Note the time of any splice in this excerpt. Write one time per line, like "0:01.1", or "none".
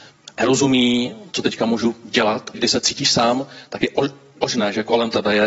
0:02.5